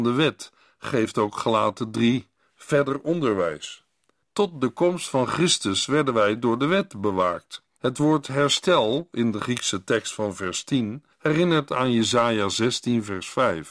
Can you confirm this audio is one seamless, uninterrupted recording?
no; 3 cuts; at 4.2 s, 7.8 s, 11.1 s

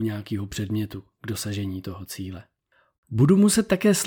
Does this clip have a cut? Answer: yes; 1 cut; at 2.9 s

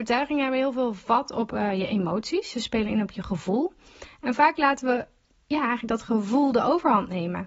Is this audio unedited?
yes; 0 cuts

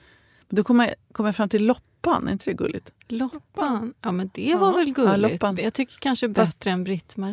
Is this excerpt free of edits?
yes; 0 cuts

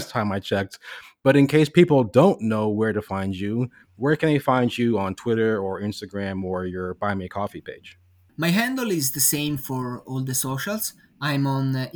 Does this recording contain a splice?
no; 0 cuts

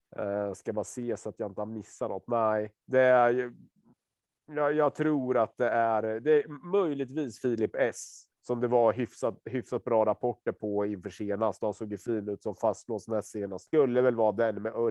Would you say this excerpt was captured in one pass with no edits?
no; 3 cuts; at 2.8 s, 8.3 s, 13.7 s

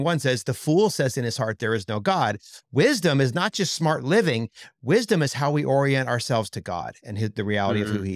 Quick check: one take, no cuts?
no; 1 cut; at 2.6 s

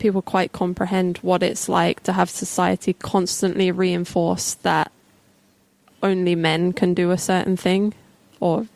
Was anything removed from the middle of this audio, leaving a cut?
no; 0 cuts

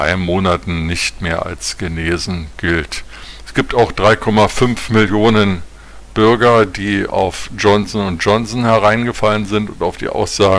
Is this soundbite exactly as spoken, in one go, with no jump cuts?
yes; 0 cuts

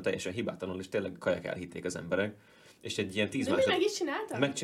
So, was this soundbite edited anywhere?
no; 0 cuts

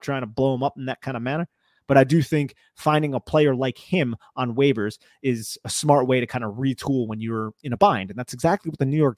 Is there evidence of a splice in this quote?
no; 0 cuts

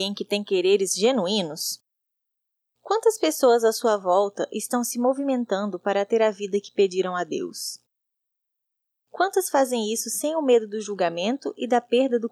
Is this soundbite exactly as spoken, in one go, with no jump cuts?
yes; 0 cuts

